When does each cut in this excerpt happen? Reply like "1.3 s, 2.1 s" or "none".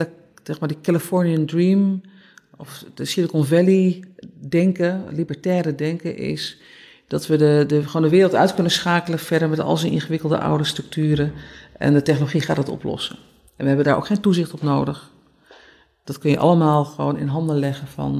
none